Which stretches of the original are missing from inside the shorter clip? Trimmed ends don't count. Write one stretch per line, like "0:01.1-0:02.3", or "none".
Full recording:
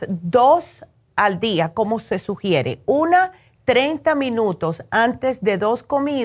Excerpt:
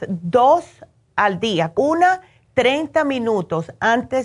0:01.7-0:02.8